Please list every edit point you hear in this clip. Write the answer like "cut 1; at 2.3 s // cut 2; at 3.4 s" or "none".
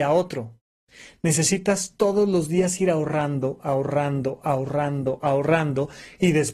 cut 1; at 5.2 s